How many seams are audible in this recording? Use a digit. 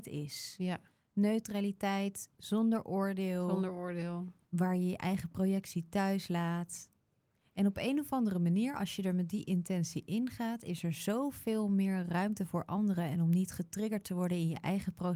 0